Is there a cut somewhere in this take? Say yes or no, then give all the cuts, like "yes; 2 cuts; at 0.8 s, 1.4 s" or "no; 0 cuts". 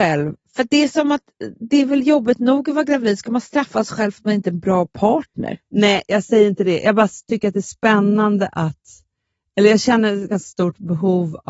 no; 0 cuts